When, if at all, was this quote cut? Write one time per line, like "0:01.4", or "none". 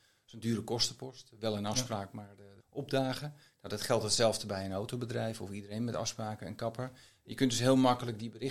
0:02.6